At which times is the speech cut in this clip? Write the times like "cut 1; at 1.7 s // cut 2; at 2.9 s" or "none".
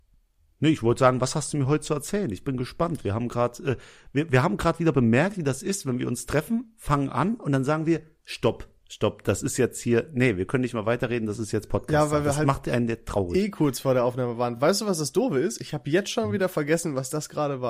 none